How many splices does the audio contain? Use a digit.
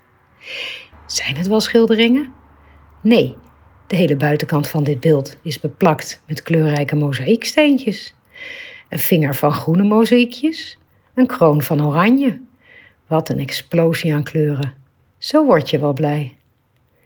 1